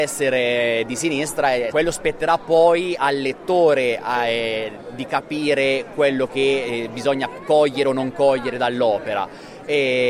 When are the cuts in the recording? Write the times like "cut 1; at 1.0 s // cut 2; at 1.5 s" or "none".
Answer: cut 1; at 1.7 s